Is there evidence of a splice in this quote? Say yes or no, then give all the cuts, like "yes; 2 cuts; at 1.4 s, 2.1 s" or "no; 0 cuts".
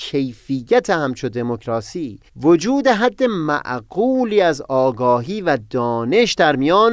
yes; 1 cut; at 2.3 s